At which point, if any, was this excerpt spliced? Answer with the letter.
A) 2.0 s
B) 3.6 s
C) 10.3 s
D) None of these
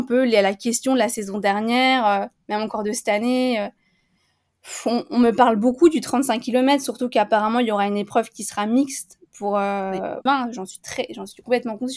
C